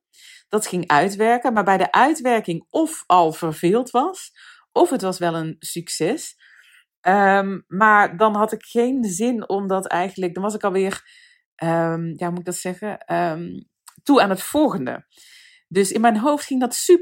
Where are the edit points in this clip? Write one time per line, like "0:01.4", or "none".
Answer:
none

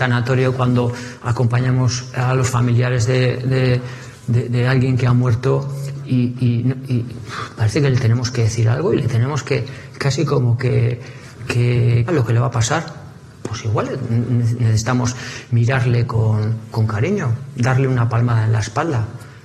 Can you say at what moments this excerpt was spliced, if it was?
0:12.1

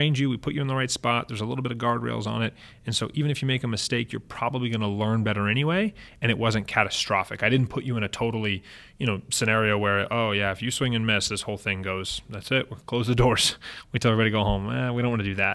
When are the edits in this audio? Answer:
none

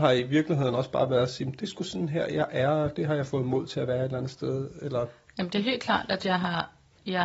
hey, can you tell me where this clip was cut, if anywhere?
none

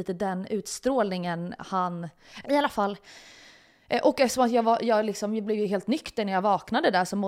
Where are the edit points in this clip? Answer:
0:02.4

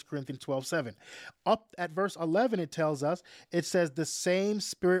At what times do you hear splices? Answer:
none

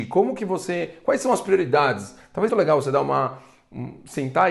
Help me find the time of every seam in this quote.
0:02.5

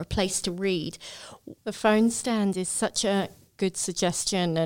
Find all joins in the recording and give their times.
0:01.6

